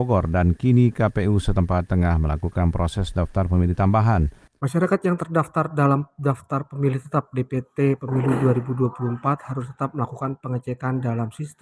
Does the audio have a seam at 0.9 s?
no; 1 cut; at 4.5 s

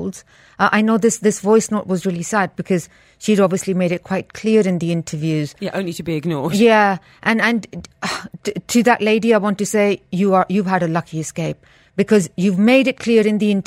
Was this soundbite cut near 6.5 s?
no; 0 cuts

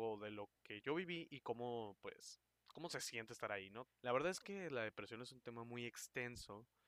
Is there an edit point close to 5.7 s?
no; 1 cut; at 3.9 s

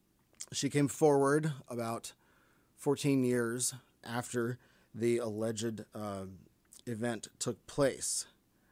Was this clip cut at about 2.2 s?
no; 2 cuts; at 4.0 s, 6.8 s

